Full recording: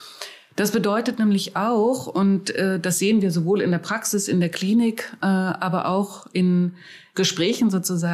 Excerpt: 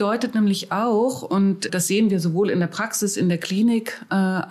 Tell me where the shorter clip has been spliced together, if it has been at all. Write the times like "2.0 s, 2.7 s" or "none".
1.7 s